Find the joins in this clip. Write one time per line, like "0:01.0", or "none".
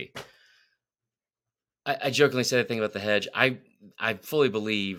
none